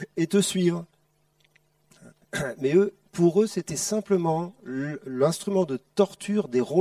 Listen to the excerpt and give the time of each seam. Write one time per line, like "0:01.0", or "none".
0:02.2